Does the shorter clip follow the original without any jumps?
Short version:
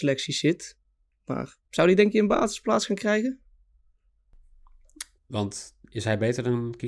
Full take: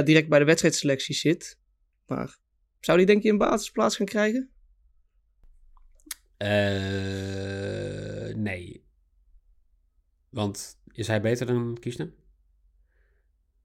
no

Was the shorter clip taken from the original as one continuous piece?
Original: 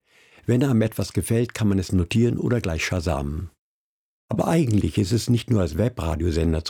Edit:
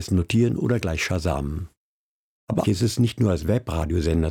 no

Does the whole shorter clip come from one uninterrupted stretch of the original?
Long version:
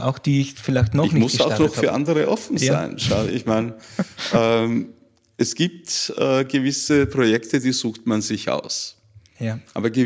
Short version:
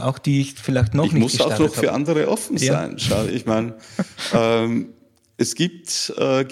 yes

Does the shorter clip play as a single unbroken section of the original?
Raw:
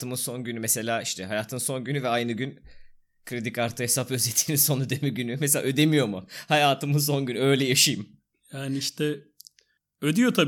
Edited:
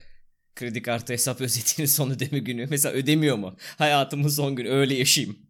yes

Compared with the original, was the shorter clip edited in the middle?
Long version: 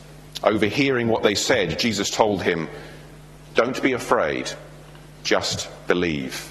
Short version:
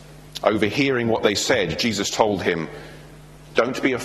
no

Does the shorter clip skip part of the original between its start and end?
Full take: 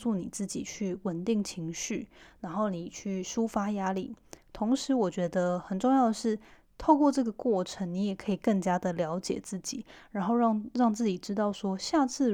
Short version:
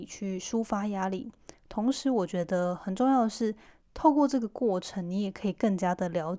no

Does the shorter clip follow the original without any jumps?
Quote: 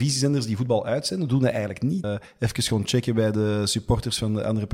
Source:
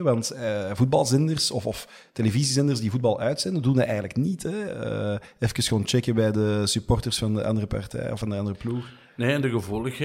no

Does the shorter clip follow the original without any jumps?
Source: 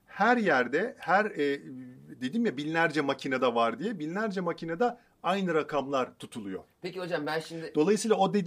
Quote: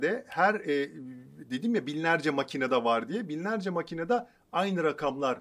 yes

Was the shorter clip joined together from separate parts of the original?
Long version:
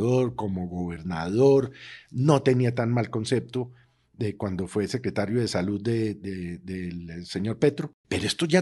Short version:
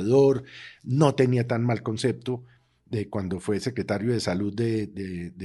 no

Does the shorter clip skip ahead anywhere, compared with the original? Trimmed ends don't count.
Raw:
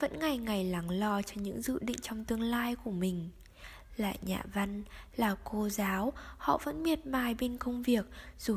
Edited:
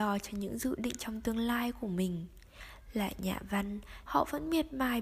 yes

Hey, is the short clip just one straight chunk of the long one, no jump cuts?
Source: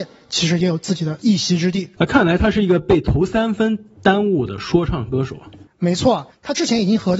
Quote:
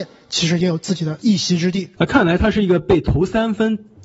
yes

